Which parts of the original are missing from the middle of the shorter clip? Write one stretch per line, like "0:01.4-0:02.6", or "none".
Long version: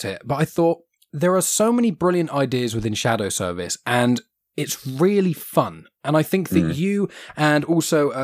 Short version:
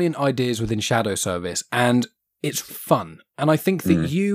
0:04.8-0:05.3